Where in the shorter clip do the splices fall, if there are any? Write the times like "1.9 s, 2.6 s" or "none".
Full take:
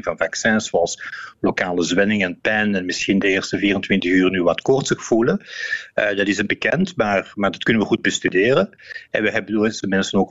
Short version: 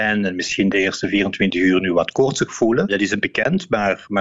2.9 s